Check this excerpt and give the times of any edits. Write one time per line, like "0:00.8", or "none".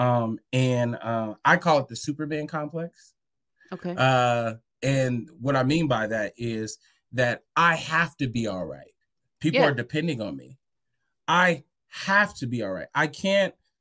none